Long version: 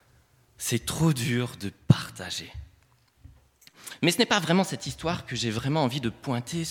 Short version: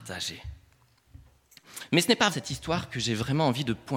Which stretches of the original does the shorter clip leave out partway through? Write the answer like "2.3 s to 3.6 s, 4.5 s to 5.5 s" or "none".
4.4 s to 4.7 s